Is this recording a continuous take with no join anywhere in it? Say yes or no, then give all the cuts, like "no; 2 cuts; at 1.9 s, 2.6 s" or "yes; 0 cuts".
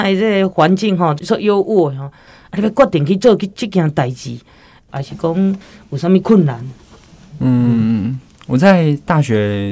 no; 2 cuts; at 1.2 s, 4.9 s